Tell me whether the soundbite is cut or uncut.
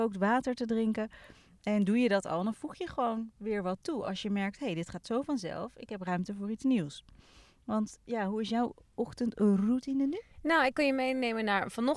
uncut